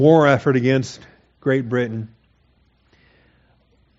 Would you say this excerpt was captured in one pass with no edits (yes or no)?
yes